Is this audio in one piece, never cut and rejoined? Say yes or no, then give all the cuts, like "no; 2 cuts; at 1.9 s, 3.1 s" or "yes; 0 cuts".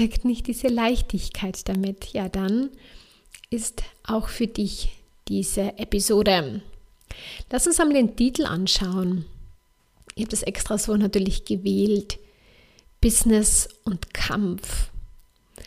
yes; 0 cuts